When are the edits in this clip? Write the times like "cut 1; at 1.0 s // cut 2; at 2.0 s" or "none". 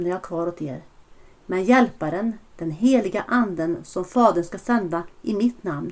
cut 1; at 1.4 s